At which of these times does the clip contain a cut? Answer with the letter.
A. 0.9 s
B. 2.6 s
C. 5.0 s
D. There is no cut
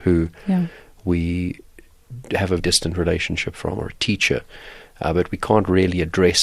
B